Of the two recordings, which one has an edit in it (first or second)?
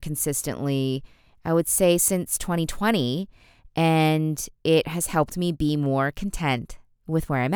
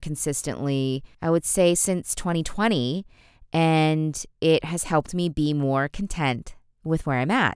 second